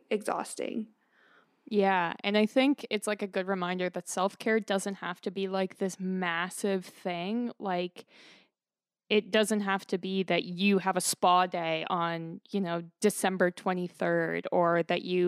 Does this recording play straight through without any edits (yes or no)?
yes